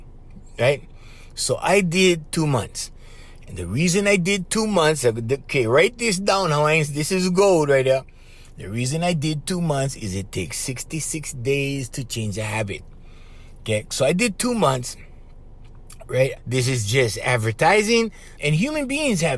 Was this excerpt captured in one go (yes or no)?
no